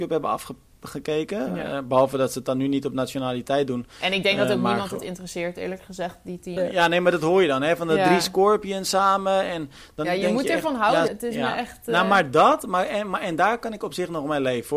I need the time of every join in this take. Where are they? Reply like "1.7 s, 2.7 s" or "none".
6.6 s, 11.1 s